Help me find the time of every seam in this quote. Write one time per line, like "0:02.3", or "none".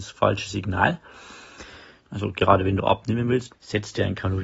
0:02.0
0:03.5